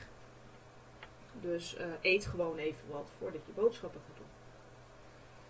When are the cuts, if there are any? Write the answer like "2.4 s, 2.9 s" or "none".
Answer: none